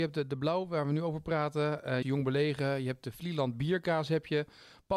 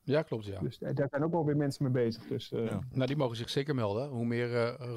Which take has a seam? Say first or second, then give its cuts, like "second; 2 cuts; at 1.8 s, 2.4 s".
first; 1 cut; at 2.0 s